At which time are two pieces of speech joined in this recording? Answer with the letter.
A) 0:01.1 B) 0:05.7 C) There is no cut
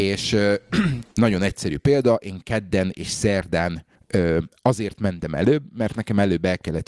A